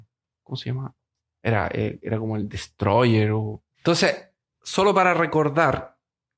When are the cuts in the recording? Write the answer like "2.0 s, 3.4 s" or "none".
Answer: 3.7 s